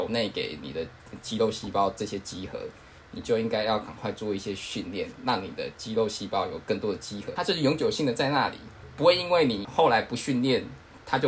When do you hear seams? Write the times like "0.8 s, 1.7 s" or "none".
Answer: 7.4 s